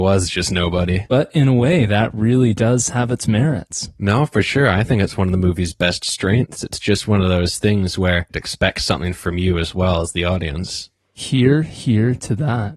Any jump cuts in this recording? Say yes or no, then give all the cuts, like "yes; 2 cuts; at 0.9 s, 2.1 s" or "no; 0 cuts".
no; 0 cuts